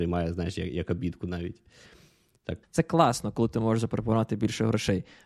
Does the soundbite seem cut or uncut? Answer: cut